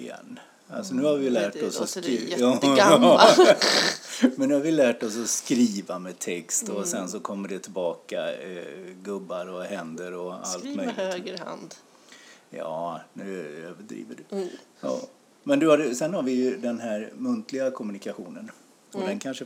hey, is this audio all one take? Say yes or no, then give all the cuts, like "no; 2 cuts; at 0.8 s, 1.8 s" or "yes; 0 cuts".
no; 1 cut; at 4.3 s